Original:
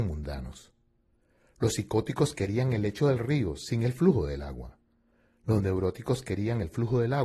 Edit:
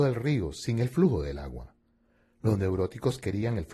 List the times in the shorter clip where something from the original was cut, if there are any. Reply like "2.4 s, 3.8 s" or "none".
none